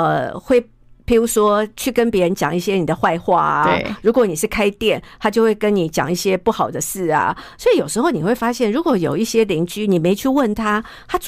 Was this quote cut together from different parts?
no; 0 cuts

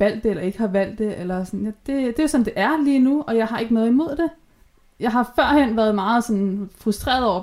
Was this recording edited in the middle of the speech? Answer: no; 0 cuts

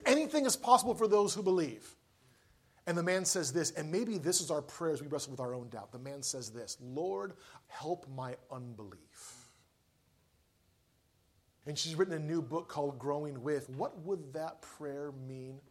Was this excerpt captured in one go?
no; 3 cuts; at 7.6 s, 11.6 s, 13.7 s

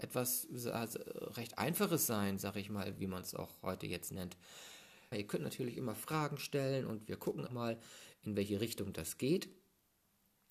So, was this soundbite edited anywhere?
yes; 3 cuts; at 3.0 s, 5.1 s, 7.5 s

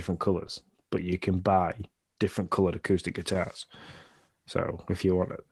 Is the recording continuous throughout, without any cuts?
yes; 0 cuts

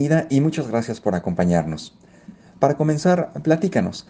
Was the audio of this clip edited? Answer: no; 0 cuts

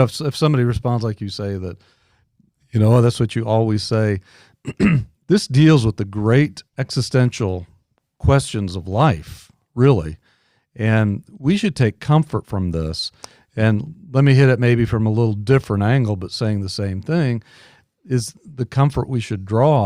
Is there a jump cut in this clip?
yes; 1 cut; at 6.7 s

